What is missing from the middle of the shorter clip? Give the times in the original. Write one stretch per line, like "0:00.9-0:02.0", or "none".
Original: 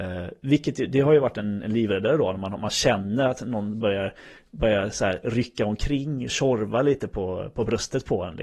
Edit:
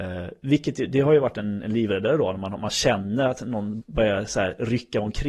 0:03.8-0:04.4